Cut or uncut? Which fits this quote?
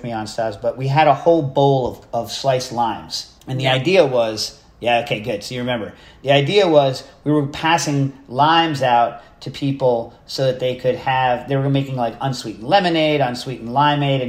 cut